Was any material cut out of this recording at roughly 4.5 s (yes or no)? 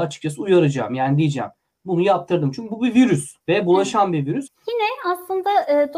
yes